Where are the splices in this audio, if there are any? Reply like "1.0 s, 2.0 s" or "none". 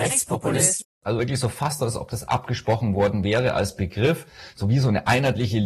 none